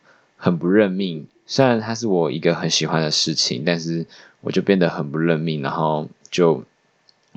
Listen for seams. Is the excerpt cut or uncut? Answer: uncut